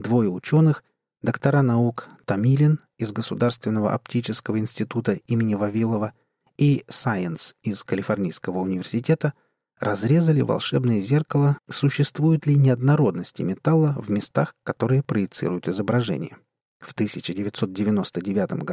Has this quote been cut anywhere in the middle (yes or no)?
yes